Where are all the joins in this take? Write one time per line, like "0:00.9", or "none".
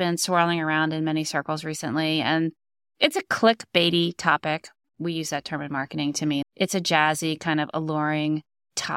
0:06.4